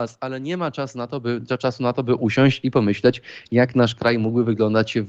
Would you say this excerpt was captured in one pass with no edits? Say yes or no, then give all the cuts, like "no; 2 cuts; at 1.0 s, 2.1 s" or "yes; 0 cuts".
yes; 0 cuts